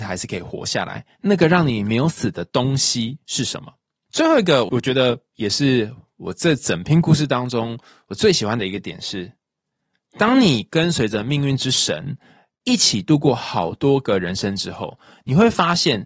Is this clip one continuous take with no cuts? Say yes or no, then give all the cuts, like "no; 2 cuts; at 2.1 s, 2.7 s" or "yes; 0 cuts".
yes; 0 cuts